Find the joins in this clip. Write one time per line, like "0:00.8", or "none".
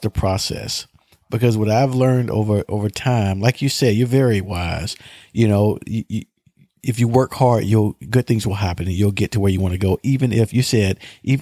none

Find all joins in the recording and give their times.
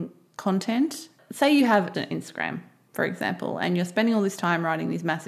0:01.9

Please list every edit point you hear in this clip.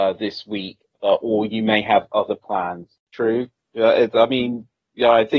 0:03.1

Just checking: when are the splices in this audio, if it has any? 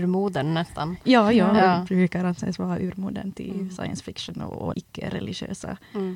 0:04.7

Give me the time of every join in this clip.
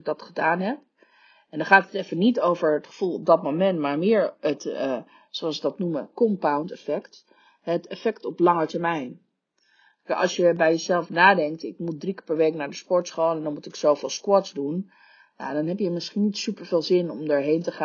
none

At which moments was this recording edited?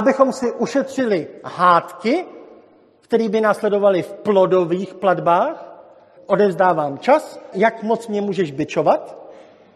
0:06.2
0:07.5

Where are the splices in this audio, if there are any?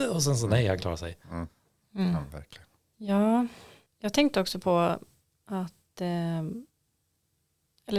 0:03.9

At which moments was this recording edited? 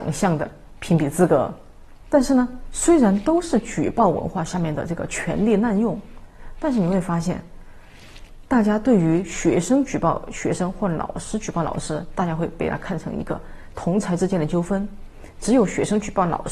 0:02.1

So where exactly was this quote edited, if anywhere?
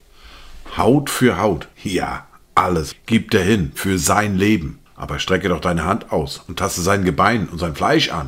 0:01.7
0:02.9
0:04.9

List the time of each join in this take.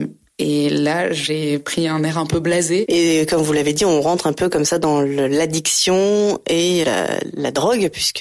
0:02.9
0:06.8

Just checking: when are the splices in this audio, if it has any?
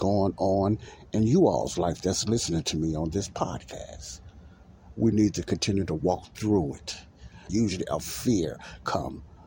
0:04.9
0:07.5

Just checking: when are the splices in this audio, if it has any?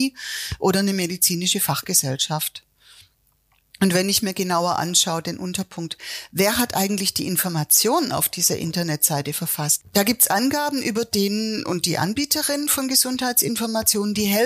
0:09.8

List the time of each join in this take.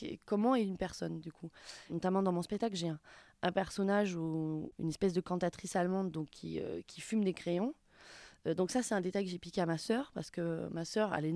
none

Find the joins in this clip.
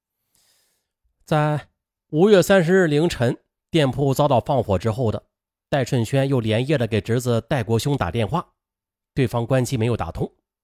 none

